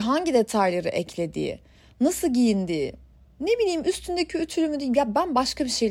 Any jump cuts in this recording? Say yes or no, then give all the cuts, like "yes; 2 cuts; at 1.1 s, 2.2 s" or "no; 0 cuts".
no; 0 cuts